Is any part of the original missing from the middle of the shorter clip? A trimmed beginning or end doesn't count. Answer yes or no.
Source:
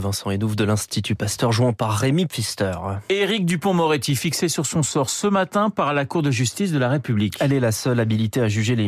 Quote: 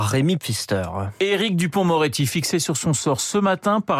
no